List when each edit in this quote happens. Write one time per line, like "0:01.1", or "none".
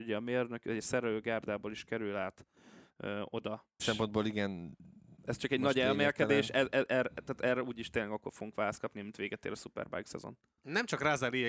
0:03.8
0:05.2